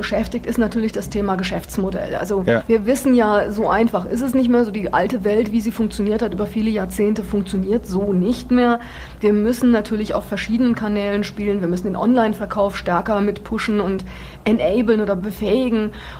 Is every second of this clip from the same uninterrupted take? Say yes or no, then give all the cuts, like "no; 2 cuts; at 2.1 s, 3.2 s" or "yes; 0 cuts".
yes; 0 cuts